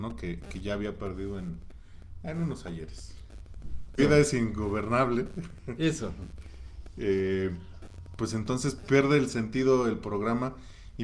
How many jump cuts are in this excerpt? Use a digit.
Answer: 1